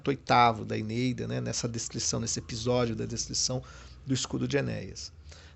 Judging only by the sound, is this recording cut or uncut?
uncut